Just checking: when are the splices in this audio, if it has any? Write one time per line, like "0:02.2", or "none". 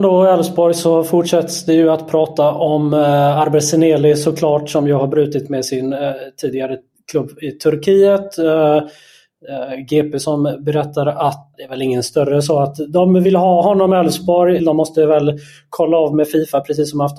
0:11.5
0:14.6